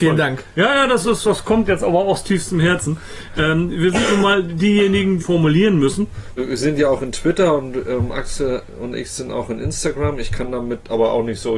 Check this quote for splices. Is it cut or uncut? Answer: cut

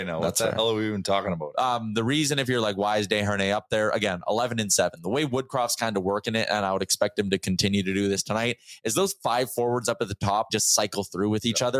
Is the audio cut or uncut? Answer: cut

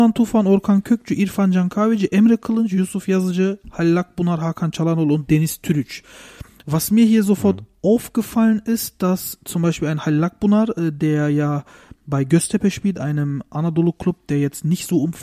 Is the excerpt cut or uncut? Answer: uncut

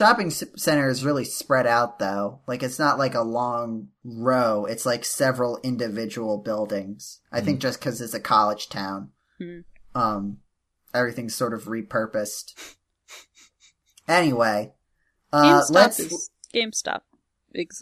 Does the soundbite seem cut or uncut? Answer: uncut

